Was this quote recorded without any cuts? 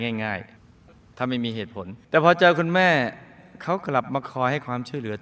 no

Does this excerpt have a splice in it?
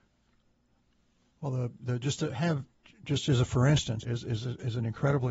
yes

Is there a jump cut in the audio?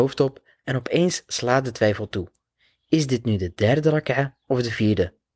no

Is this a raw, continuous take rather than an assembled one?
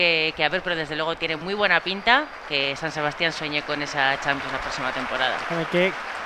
yes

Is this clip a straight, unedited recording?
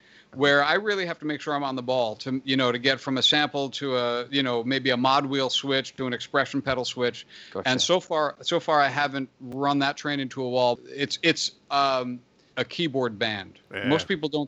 no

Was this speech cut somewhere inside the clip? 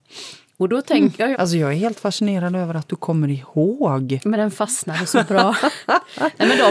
yes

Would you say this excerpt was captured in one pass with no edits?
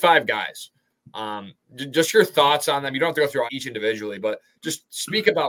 no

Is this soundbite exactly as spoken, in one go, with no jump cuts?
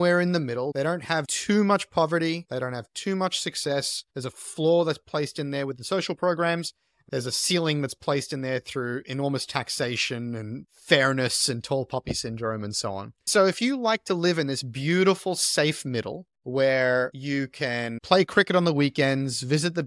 yes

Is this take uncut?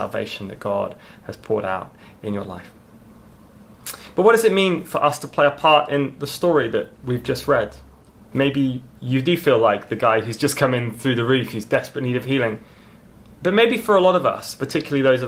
yes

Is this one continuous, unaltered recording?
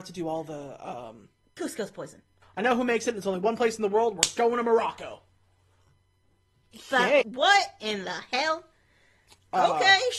no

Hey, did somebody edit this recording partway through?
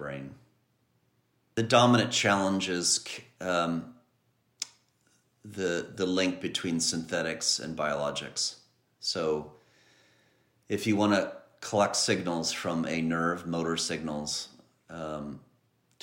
no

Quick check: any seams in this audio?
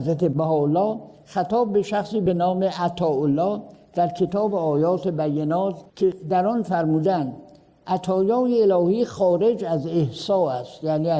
yes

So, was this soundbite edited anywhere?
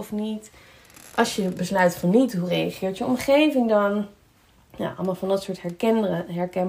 no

